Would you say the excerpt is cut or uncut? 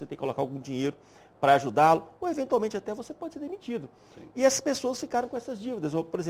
uncut